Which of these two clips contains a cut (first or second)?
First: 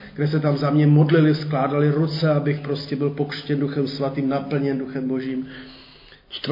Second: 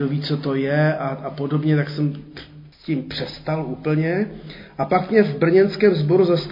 second